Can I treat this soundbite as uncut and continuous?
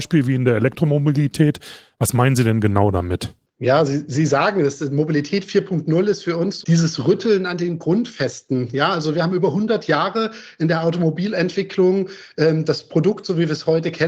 no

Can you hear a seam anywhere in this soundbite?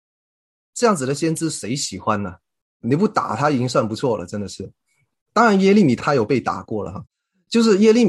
no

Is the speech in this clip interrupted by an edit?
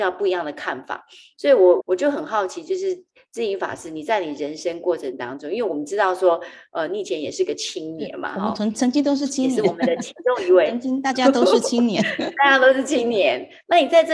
yes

